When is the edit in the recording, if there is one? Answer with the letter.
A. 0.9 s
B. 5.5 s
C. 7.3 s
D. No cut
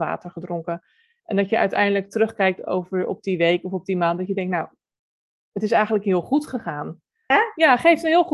C